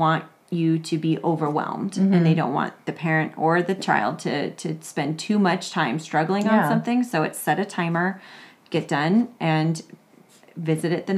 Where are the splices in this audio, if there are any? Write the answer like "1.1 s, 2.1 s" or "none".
none